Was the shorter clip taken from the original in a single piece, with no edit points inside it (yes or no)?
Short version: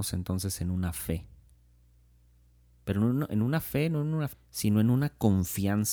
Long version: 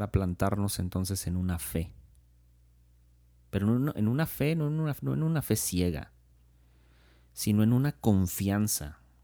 no